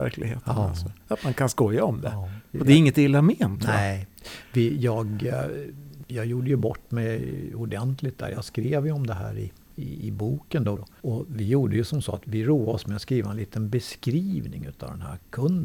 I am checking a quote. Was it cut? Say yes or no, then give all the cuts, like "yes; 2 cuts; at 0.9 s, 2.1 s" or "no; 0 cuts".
yes; 2 cuts; at 10.8 s, 12.2 s